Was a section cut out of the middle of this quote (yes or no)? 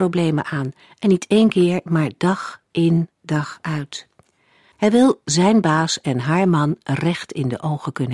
yes